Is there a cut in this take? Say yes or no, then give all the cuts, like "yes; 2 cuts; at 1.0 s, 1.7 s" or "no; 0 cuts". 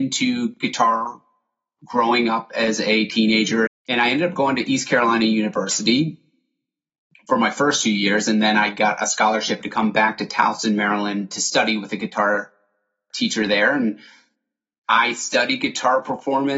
yes; 1 cut; at 3.7 s